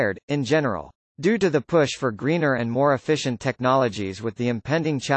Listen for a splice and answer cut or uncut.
cut